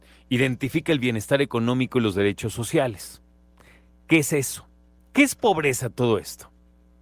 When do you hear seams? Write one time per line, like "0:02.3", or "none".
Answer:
0:05.0